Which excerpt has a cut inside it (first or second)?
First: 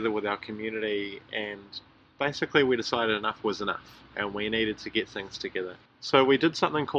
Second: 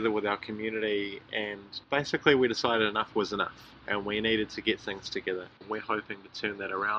second